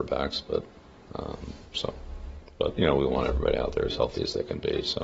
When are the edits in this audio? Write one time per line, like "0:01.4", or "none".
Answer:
0:01.0